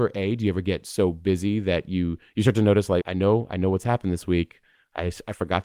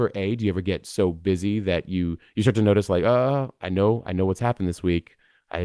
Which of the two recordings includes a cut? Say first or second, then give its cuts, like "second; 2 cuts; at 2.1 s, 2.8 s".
first; 1 cut; at 3.0 s